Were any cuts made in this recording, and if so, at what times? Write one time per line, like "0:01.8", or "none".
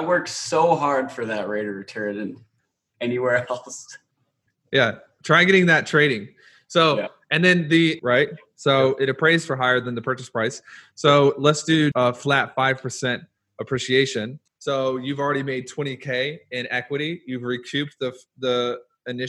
0:08.0
0:11.9
0:14.5